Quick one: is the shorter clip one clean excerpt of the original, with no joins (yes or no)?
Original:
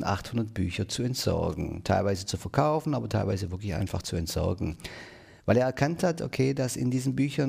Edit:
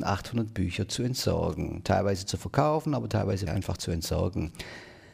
no